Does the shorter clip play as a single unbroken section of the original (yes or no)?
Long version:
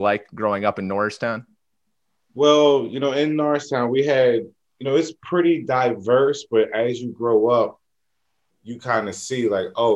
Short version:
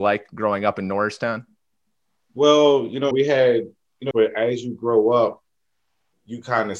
no